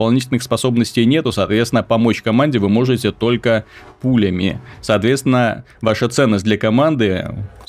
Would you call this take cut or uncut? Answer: uncut